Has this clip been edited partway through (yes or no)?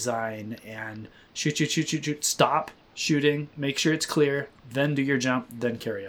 no